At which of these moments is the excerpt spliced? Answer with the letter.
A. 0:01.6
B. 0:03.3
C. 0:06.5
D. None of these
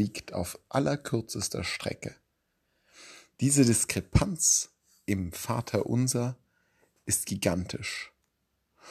B